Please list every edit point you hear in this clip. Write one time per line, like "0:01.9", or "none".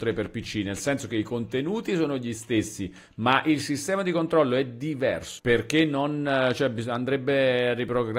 0:05.4